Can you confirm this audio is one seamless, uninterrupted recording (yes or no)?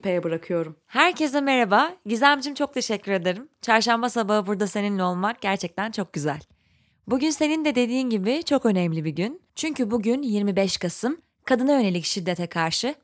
yes